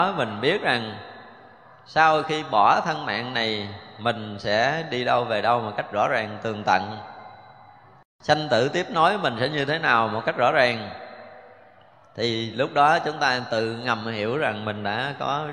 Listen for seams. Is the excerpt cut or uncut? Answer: uncut